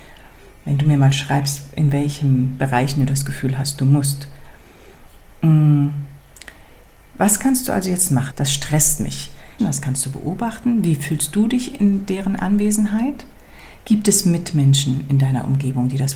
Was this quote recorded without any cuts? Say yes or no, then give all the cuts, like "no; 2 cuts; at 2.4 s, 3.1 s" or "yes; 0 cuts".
no; 2 cuts; at 8.3 s, 9.6 s